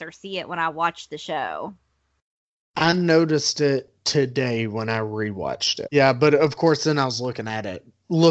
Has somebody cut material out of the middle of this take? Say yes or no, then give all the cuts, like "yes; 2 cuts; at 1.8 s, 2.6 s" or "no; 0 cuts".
yes; 1 cut; at 5.9 s